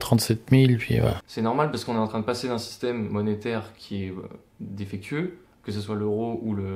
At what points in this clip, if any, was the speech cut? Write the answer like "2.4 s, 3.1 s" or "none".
1.2 s